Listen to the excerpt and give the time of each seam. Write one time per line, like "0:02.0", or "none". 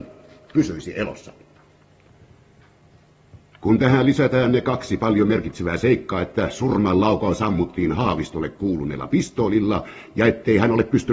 none